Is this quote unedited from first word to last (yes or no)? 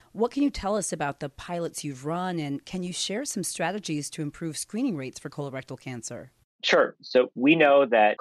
yes